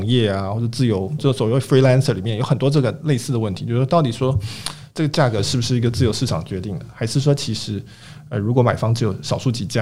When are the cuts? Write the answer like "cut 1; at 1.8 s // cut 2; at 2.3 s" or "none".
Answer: none